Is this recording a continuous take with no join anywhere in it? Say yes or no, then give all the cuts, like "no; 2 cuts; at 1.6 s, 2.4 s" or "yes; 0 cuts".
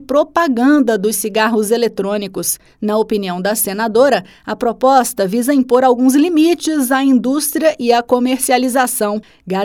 yes; 0 cuts